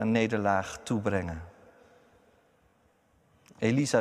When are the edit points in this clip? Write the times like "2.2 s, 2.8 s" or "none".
none